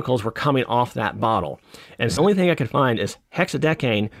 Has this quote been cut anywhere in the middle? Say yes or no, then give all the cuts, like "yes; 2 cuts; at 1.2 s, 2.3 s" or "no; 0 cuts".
yes; 1 cut; at 2.2 s